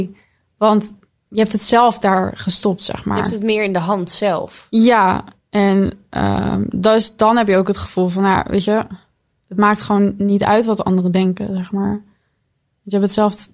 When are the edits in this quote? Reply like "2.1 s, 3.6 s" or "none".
none